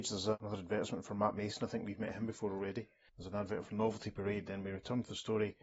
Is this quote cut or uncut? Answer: uncut